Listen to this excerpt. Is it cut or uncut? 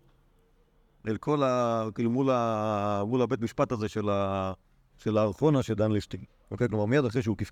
uncut